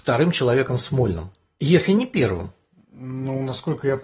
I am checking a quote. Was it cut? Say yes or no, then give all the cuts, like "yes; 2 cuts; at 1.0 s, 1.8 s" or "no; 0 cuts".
no; 0 cuts